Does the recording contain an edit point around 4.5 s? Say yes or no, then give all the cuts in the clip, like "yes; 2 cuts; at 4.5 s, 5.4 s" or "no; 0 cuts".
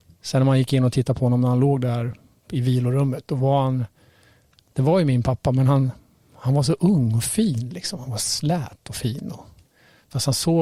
no; 1 cut; at 2.4 s